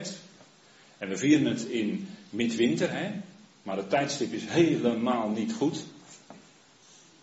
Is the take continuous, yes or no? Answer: yes